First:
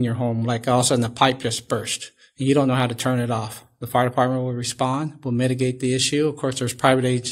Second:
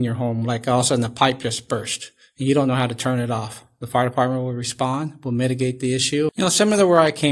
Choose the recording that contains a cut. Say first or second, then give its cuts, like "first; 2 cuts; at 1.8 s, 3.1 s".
second; 1 cut; at 6.3 s